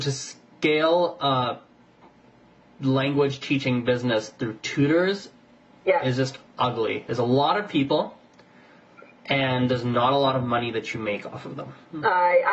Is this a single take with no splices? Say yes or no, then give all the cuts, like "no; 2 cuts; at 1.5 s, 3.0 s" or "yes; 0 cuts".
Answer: yes; 0 cuts